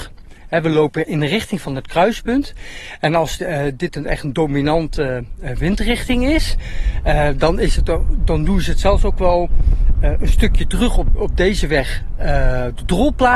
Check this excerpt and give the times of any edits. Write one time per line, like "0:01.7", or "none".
0:11.2